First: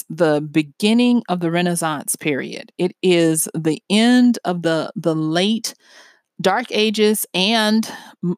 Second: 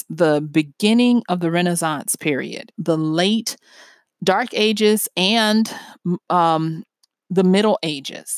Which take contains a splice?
second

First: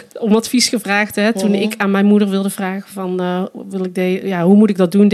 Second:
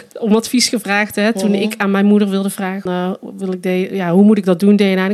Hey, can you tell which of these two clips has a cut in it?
second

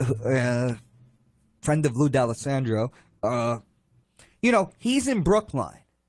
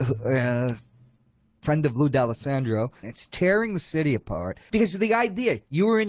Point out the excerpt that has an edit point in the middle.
second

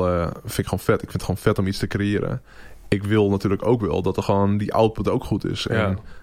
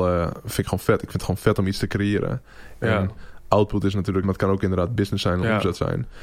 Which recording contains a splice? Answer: second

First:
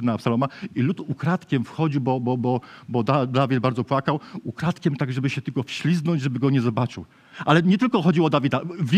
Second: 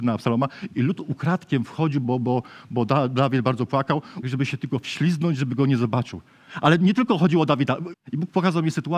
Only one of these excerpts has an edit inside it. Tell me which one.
second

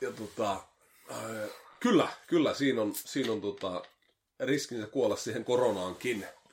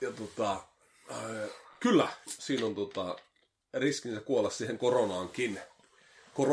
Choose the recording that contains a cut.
second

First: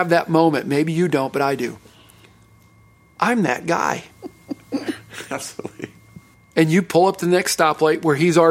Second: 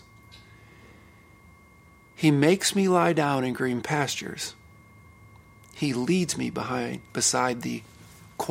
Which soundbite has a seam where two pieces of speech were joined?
first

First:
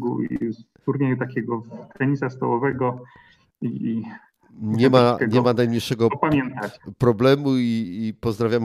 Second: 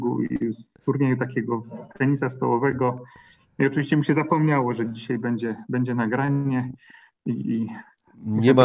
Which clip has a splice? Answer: first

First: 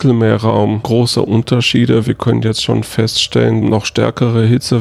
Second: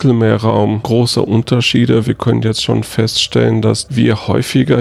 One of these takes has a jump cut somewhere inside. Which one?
first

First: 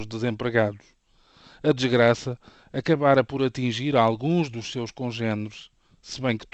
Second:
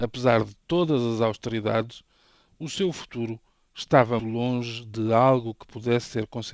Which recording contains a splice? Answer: second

